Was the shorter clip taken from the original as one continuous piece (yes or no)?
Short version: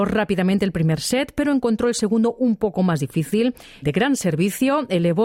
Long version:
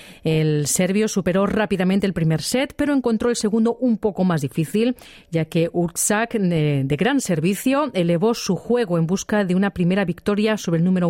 no